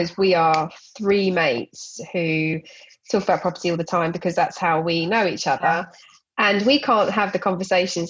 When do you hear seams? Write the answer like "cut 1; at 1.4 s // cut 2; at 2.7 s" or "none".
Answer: none